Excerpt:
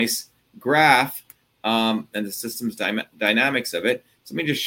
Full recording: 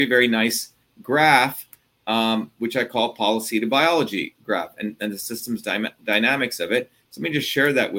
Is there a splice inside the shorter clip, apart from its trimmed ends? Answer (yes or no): yes